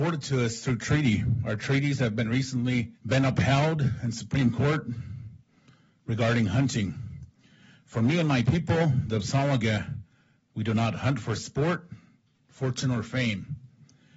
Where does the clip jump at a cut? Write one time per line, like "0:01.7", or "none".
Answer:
0:03.0